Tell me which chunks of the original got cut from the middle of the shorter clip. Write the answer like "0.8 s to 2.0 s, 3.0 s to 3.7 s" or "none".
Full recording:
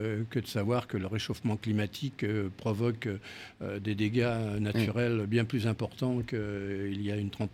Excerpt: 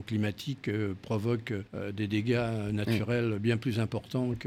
3.2 s to 3.5 s